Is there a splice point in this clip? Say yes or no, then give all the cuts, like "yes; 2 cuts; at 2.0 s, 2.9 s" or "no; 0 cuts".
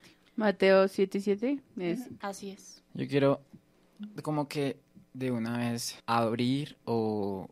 yes; 2 cuts; at 2.2 s, 6.0 s